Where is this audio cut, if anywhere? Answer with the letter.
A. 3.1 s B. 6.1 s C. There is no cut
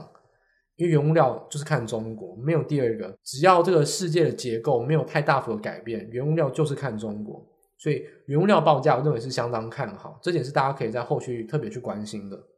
A